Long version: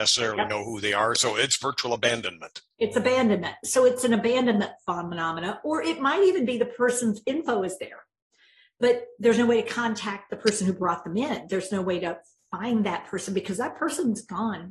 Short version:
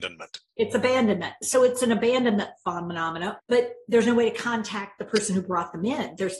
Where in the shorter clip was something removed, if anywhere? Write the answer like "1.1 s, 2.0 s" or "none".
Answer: 3.4 s